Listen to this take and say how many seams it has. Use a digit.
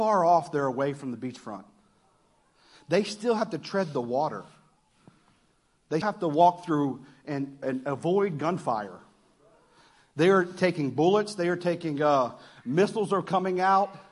1